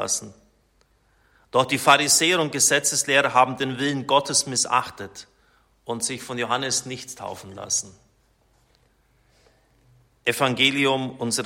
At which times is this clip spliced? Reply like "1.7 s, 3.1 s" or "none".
none